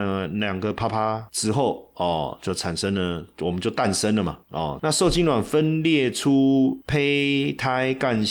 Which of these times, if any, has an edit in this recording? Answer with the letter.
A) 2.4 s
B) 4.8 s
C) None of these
B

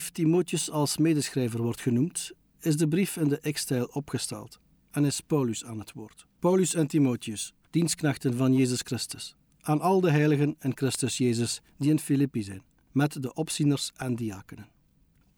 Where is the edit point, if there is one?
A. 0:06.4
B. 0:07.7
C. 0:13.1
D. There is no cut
A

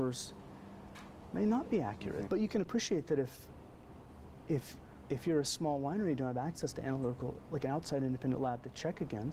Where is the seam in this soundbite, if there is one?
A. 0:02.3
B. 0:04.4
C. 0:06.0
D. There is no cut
A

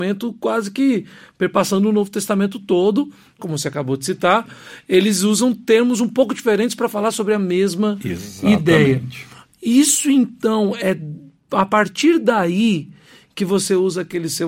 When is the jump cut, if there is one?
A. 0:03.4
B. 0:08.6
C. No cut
A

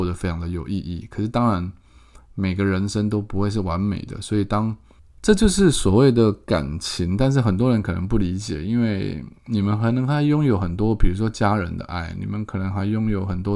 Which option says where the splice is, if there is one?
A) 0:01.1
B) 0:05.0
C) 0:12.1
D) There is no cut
B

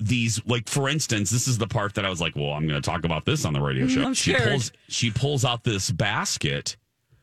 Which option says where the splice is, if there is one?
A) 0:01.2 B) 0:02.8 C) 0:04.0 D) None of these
C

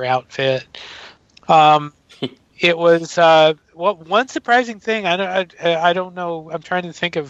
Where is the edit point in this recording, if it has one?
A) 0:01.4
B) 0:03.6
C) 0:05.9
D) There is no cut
A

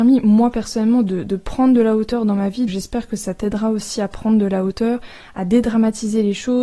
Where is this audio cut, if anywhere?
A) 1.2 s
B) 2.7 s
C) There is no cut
B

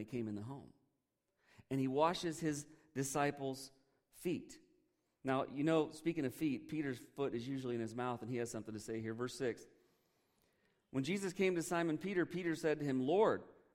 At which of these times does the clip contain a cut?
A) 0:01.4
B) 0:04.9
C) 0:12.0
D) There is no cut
D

